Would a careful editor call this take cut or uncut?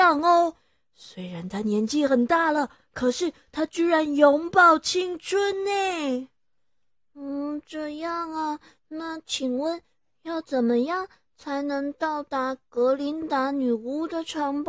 uncut